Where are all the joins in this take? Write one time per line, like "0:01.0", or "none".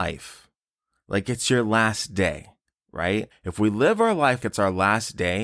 0:03.3
0:04.4